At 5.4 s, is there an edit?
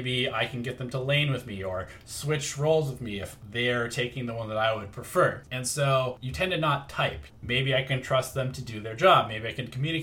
yes; 2 cuts; at 5.4 s, 7.3 s

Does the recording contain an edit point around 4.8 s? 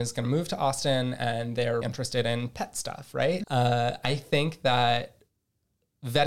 no; 2 cuts; at 1.8 s, 3.4 s

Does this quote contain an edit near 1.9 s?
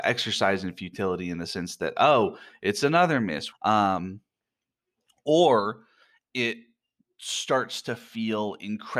no; 1 cut; at 3.5 s

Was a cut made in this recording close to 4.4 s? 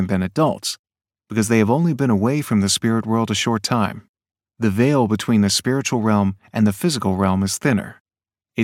no; 0 cuts

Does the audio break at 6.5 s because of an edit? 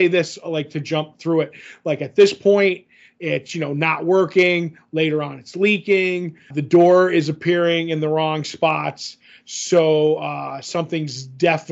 yes; 1 cut; at 6.5 s

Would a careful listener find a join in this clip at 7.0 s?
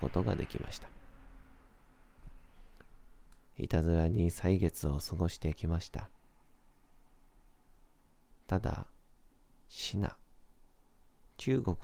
no; 1 cut; at 3.5 s

